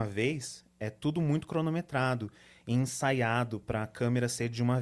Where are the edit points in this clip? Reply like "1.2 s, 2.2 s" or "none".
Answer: none